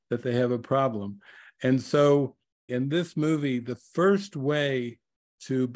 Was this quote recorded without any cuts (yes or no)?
no